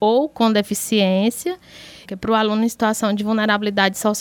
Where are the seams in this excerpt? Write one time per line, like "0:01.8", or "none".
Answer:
0:02.0